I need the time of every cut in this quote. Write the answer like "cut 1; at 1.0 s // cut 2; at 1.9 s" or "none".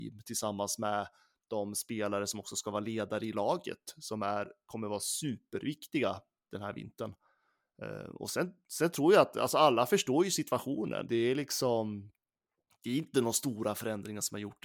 cut 1; at 11.1 s